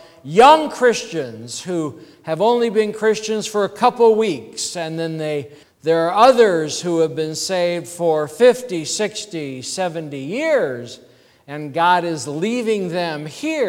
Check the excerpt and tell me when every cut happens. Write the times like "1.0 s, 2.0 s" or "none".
5.6 s